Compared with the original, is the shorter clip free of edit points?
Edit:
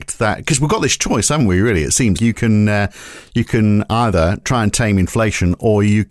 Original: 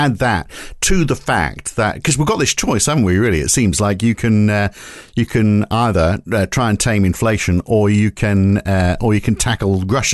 no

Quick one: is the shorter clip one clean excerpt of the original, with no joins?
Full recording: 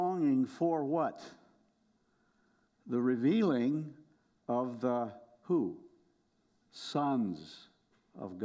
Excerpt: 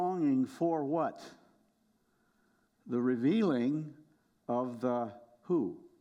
yes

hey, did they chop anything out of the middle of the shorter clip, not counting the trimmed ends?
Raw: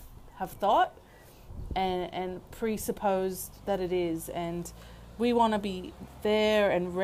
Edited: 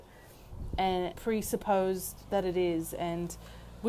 yes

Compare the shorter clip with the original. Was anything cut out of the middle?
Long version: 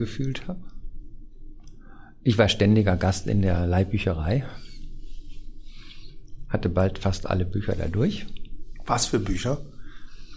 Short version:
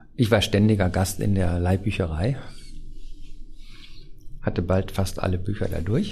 no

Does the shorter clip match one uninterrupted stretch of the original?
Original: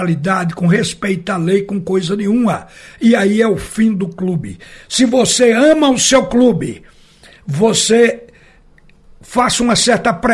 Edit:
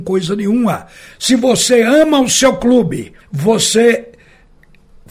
no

